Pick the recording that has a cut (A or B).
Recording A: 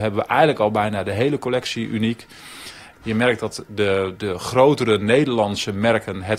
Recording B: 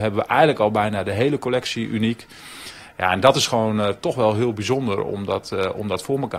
A